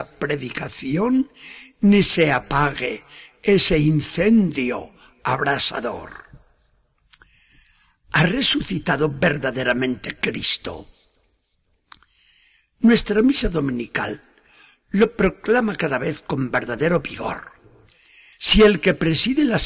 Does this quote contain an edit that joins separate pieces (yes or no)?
yes